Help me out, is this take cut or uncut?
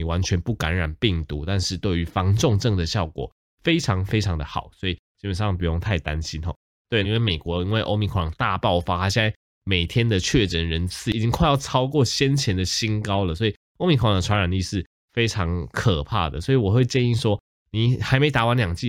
cut